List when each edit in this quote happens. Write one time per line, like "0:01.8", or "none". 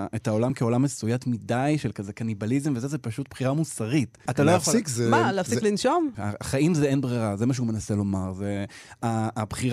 0:04.3
0:06.1